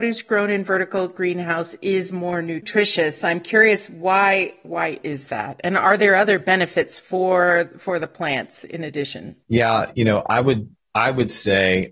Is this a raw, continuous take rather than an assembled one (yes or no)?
no